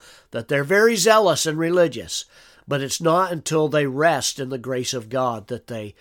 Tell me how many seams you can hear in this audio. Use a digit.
0